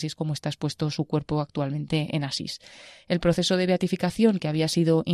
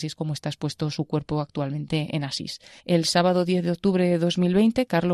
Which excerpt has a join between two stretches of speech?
second; 1 cut; at 2.8 s

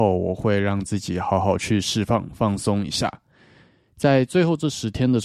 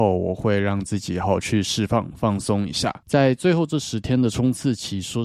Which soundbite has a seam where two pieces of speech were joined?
second; 2 cuts; at 1.2 s, 3.0 s

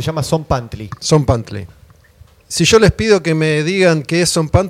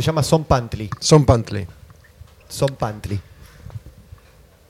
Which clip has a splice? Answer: first; 1 cut; at 2.4 s

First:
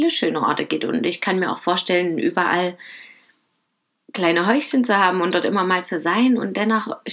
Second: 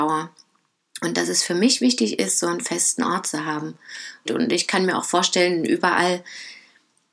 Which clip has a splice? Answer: second; 1 cut; at 4.3 s

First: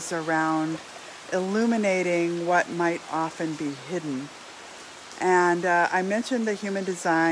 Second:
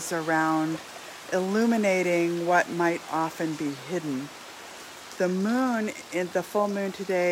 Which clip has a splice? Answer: second; 1 cut; at 5.1 s

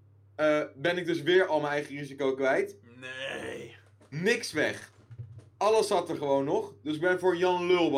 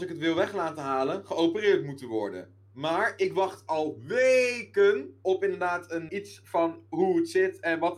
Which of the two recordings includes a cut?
second; 1 cut; at 6.1 s

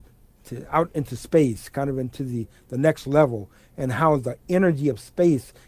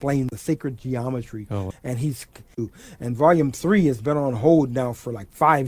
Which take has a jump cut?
second; 1 cut; at 1.7 s

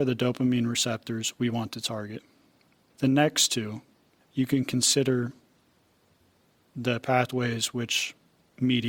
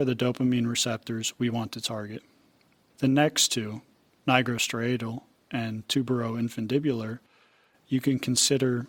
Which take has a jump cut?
first; 1 cut; at 4.2 s

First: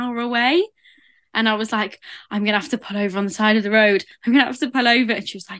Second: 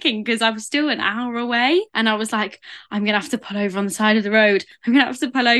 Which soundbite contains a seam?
second; 1 cut; at 1.9 s

